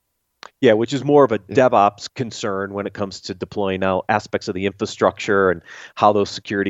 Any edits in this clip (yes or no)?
no